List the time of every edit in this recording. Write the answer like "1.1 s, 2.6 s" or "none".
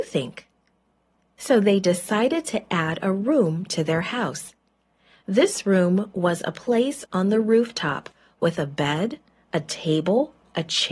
none